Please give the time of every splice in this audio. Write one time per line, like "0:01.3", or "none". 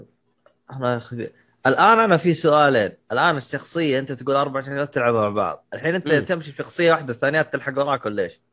none